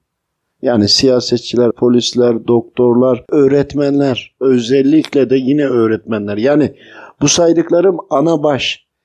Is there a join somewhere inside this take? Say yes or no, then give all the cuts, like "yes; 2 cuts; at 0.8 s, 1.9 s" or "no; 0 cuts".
yes; 1 cut; at 1.7 s